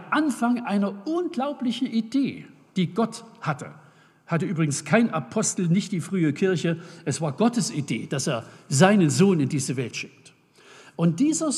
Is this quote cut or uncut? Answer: uncut